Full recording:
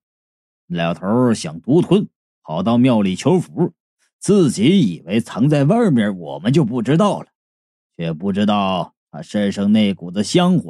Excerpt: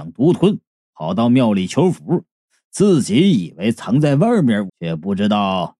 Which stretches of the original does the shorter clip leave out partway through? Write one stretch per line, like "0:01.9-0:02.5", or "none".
0:06.2-0:07.9

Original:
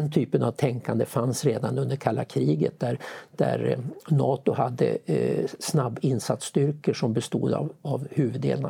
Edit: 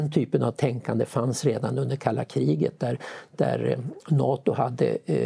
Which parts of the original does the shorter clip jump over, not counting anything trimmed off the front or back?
none

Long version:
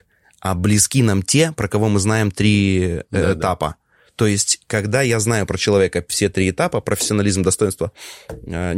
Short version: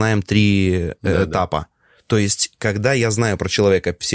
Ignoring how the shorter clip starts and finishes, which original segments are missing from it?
none

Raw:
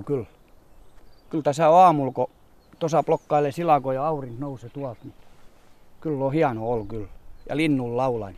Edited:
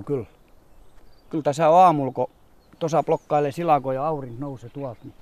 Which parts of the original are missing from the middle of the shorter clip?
none

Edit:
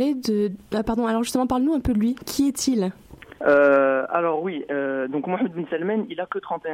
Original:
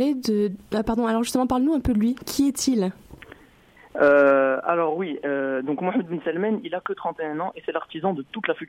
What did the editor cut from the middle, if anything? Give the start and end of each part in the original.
0:03.4-0:03.9

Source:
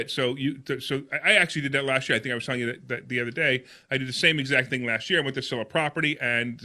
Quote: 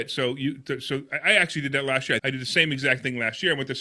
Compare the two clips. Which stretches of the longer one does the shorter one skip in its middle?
0:02.2-0:03.9

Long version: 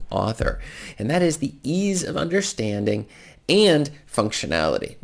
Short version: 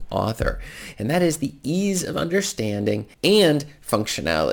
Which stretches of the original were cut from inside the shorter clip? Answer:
0:03.1-0:03.4

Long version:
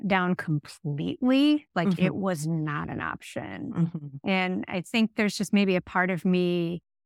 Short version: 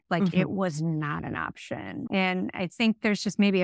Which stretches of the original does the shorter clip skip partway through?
0:03.7-0:04.2

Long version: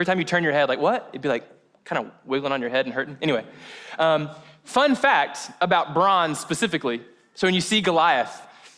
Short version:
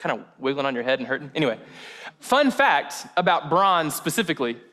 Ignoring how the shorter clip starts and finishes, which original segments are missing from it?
0:04.0-0:04.5

